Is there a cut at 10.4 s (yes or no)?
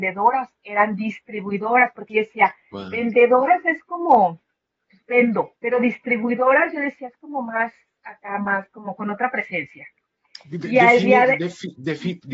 no